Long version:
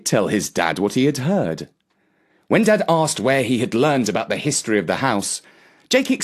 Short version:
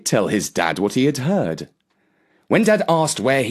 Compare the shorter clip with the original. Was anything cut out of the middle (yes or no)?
no